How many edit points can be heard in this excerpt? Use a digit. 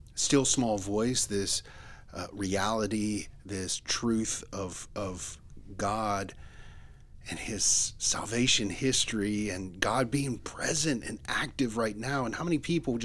0